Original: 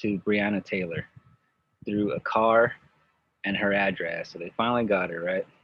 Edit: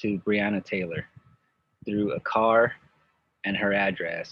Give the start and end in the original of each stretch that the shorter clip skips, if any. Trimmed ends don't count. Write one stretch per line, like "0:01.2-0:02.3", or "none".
none